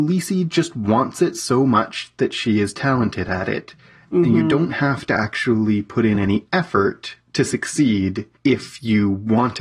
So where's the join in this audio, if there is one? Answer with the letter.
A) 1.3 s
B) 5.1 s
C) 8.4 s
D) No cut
C